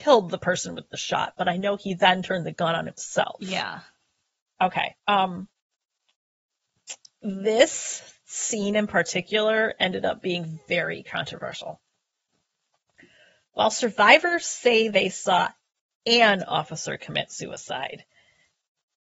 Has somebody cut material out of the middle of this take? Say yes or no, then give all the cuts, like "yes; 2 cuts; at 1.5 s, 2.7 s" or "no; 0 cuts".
yes; 1 cut; at 5.0 s